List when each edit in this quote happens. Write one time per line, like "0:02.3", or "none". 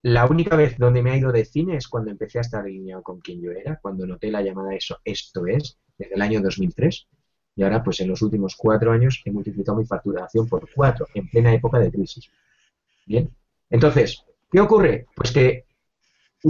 none